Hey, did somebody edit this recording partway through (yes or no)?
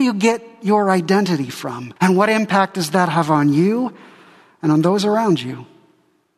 yes